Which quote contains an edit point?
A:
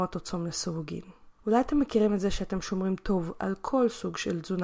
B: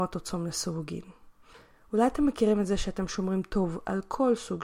A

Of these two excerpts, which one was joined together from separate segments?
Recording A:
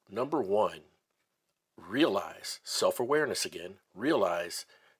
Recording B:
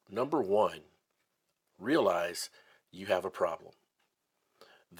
B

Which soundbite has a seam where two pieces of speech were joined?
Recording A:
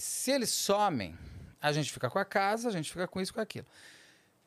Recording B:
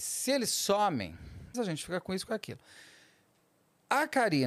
B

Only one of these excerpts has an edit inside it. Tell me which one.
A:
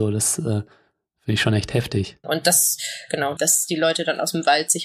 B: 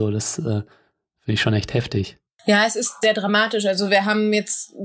A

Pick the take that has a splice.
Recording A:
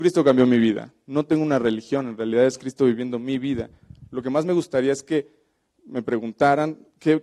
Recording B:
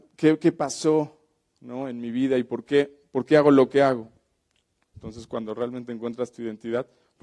B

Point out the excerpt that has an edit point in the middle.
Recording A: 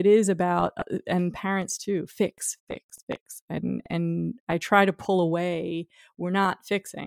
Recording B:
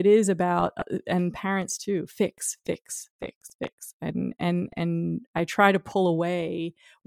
A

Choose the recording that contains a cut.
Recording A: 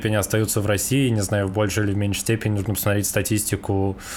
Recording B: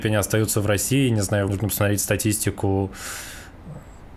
B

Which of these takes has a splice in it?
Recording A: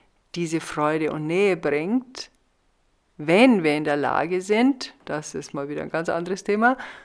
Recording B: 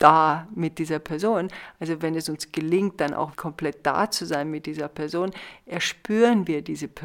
B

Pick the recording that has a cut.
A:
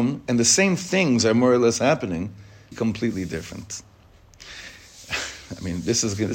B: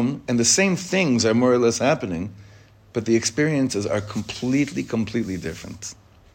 A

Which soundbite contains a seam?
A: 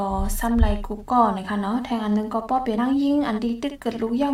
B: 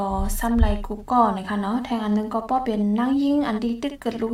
A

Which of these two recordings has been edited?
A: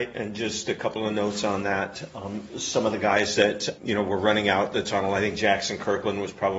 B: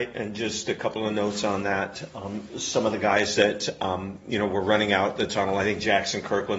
A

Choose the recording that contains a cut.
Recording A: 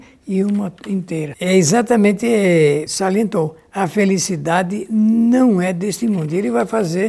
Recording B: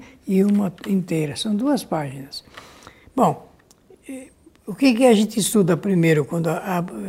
A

